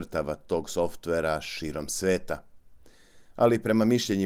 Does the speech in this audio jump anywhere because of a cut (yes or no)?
no